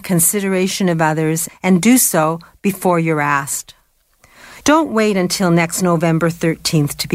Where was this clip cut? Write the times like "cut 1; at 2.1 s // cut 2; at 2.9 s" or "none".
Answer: cut 1; at 1.5 s // cut 2; at 4.6 s